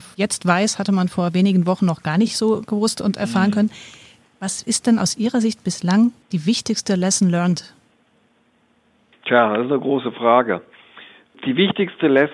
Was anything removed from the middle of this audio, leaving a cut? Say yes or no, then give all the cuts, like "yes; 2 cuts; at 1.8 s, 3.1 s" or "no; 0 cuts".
no; 0 cuts